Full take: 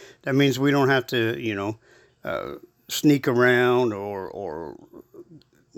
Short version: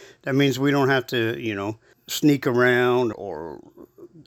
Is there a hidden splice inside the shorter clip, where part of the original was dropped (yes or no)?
yes